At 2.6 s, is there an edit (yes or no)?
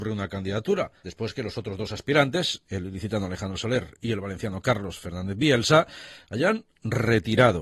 no